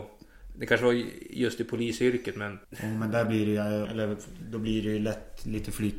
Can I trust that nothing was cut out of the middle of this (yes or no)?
no